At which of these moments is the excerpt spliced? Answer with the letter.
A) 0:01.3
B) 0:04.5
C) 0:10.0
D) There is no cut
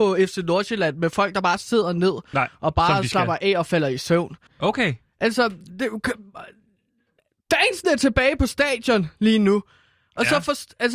B